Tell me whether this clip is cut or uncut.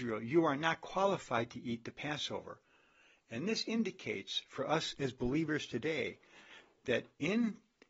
uncut